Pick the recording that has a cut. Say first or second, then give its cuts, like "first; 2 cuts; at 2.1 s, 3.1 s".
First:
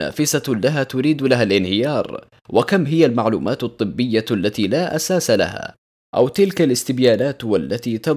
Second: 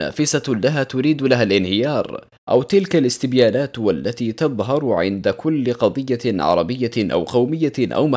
second; 1 cut; at 2.4 s